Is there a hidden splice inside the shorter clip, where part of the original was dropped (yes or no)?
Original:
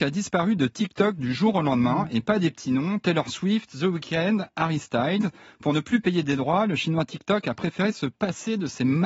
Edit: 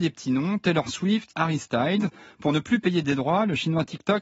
yes